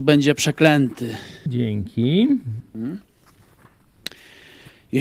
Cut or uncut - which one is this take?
cut